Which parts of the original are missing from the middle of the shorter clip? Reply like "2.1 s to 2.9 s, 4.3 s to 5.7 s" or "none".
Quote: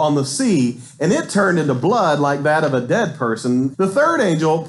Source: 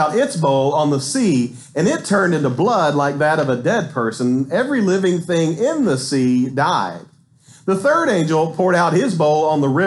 4.5 s to 7.6 s